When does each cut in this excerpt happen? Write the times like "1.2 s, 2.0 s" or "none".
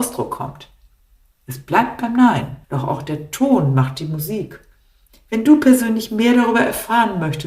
2.6 s, 5.1 s